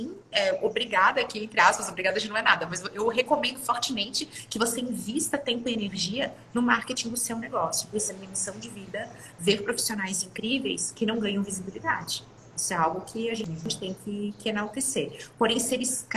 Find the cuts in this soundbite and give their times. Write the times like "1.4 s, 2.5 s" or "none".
7.9 s

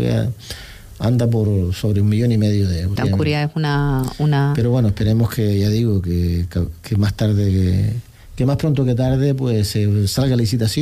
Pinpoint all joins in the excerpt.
3.0 s

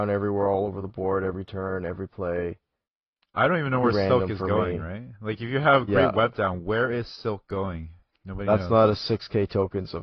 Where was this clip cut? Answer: none

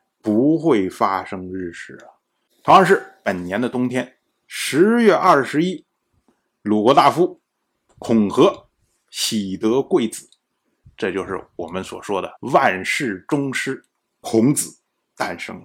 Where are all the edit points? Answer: 2.5 s, 10.8 s, 12.4 s

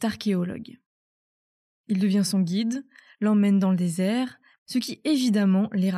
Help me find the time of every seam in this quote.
4.6 s

